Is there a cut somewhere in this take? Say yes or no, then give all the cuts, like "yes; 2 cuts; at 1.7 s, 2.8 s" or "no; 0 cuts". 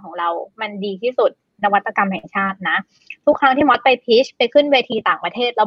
yes; 1 cut; at 1.6 s